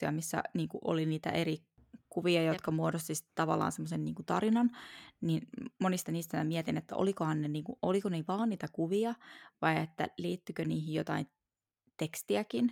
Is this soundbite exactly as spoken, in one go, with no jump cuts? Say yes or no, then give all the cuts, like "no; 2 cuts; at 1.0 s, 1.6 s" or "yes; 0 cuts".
yes; 0 cuts